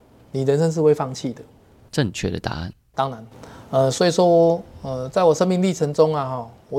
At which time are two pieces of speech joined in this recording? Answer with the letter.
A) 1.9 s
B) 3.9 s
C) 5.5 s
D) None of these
A